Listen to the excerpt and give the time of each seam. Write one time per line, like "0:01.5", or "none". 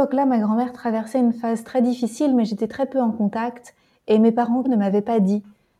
0:04.6